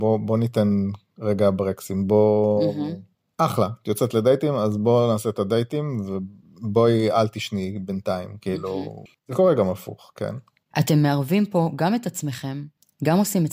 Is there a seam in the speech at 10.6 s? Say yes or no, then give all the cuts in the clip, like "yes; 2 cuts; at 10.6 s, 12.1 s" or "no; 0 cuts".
yes; 2 cuts; at 9.2 s, 10.6 s